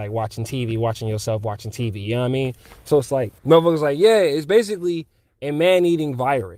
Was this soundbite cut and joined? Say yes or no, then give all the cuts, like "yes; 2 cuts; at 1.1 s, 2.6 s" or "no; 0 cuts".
yes; 1 cut; at 3.4 s